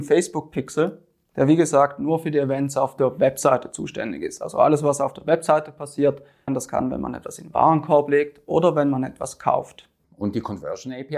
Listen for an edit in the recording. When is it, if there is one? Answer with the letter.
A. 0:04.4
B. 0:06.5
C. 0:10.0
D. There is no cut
B